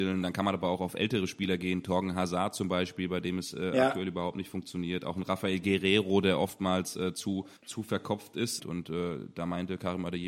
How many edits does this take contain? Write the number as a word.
two